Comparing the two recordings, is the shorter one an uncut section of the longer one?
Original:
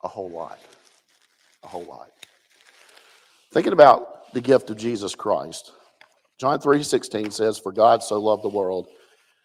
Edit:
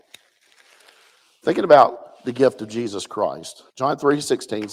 no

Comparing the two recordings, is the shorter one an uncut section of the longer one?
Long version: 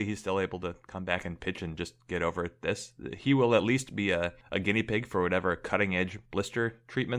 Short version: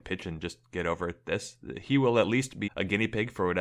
no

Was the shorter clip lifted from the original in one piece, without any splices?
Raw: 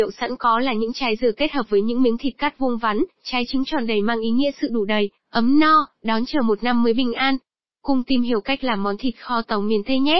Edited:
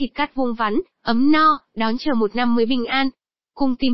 no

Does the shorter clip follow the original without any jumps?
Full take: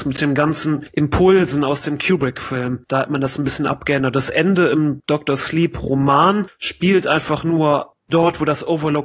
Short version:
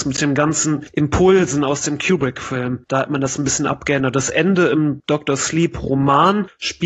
yes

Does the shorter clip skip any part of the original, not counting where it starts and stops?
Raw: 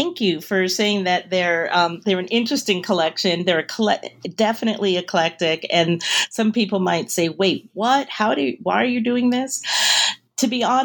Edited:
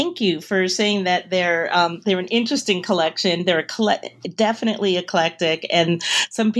no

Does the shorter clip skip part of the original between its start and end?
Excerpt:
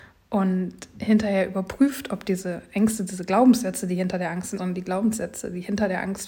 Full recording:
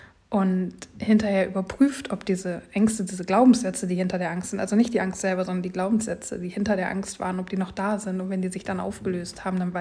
yes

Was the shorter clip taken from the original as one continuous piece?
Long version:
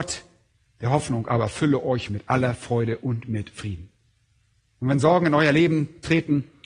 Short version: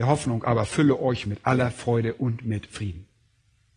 yes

